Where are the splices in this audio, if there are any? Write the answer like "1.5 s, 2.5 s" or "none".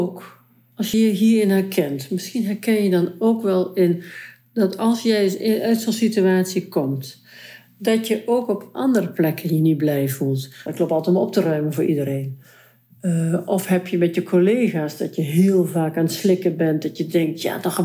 0.9 s, 10.7 s